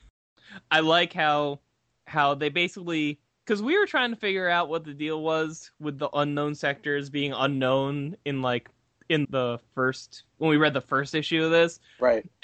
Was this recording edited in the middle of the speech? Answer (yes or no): yes